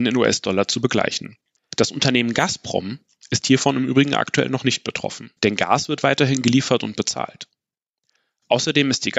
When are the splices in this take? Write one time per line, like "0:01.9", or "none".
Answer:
0:01.6
0:05.4